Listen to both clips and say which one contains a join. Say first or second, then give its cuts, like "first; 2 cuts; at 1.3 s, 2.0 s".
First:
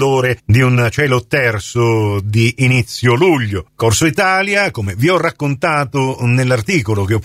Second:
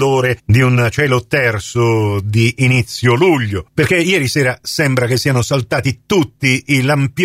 second; 1 cut; at 3.7 s